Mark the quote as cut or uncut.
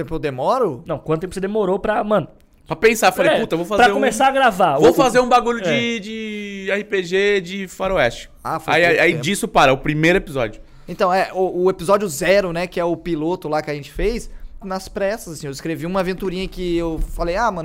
cut